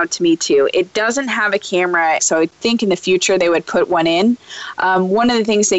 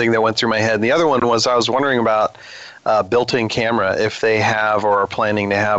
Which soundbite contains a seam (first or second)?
first